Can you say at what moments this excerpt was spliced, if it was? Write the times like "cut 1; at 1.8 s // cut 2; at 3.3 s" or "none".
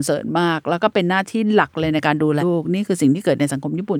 cut 1; at 2.4 s